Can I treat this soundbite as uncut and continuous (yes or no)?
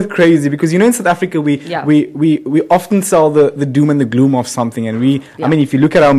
yes